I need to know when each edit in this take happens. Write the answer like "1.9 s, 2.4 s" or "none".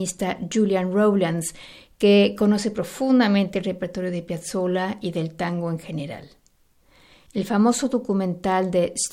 7.3 s